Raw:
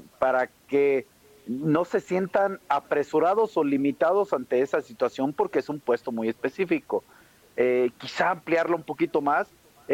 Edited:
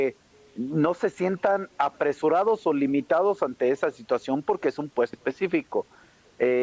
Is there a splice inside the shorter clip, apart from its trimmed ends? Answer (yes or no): yes